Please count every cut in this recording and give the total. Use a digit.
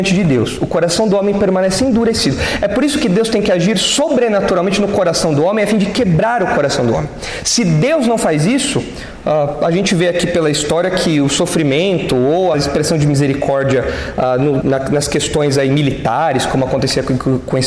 2